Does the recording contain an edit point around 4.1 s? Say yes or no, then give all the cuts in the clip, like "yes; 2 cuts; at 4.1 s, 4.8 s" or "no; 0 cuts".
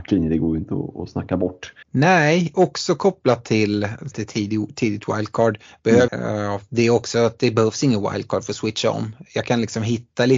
yes; 3 cuts; at 1.8 s, 4.1 s, 6.1 s